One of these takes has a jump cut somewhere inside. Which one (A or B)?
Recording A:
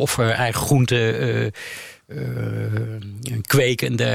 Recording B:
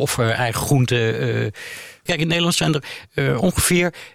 B